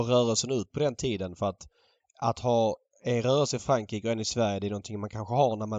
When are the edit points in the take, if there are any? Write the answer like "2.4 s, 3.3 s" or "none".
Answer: none